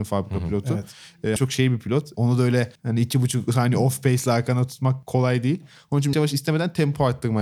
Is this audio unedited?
no; 2 cuts; at 1.4 s, 6.1 s

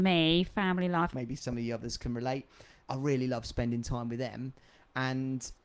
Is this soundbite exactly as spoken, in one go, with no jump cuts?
no; 2 cuts; at 1.1 s, 2.8 s

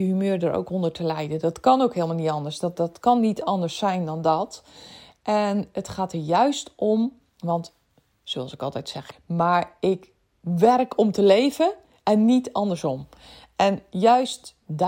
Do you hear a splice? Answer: yes; 1 cut; at 9.1 s

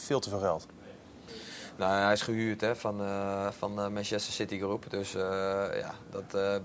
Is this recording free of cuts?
yes; 0 cuts

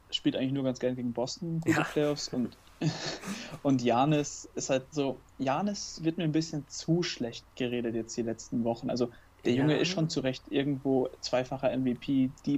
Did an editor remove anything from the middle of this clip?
yes; 1 cut; at 4.9 s

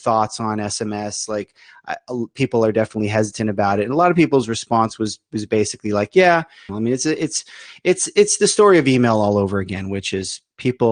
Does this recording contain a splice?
yes; 1 cut; at 6.7 s

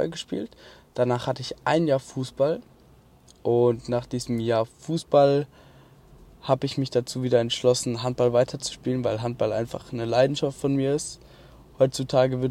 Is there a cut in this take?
no; 0 cuts

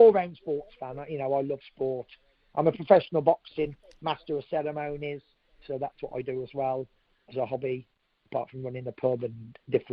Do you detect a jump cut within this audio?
no; 0 cuts

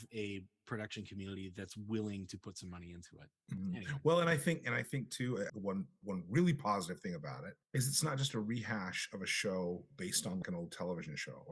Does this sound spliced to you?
yes; 3 cuts; at 5.5 s, 7.6 s, 10.4 s

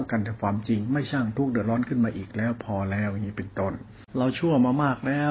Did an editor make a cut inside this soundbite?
yes; 1 cut; at 4.1 s

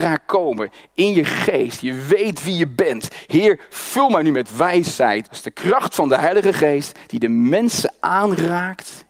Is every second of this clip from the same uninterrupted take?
no; 1 cut; at 5.2 s

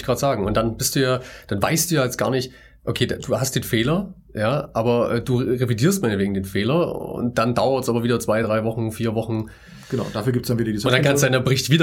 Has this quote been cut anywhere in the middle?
no; 0 cuts

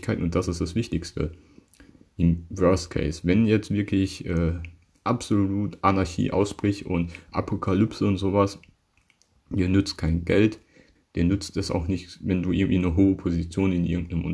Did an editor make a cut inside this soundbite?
yes; 1 cut; at 11.0 s

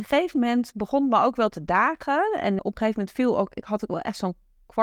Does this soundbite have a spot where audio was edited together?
yes; 1 cut; at 2.6 s

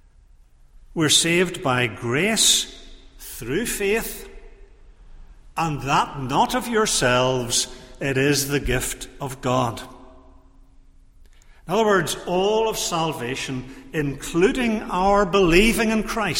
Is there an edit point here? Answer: no; 0 cuts

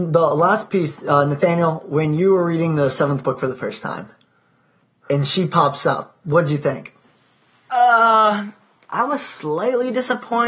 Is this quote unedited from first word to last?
yes; 0 cuts

